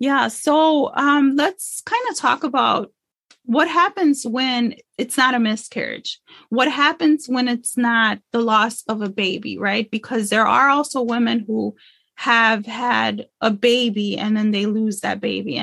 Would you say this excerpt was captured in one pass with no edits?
yes; 0 cuts

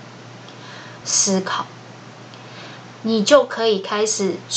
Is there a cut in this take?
yes; 2 cuts; at 1.0 s, 2.9 s

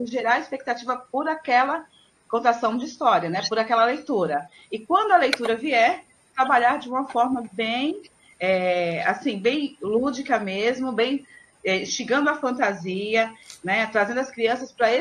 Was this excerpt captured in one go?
yes; 0 cuts

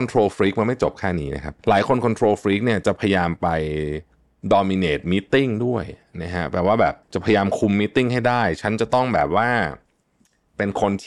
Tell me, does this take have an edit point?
yes; 2 cuts; at 1.6 s, 7.0 s

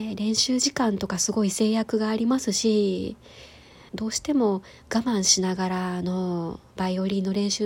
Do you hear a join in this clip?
yes; 1 cut; at 3.9 s

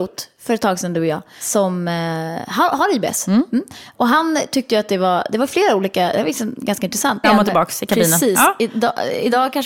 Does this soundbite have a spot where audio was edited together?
yes; 1 cut; at 7.2 s

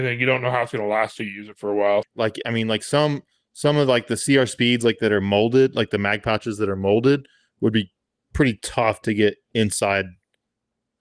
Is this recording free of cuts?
no; 1 cut; at 2.0 s

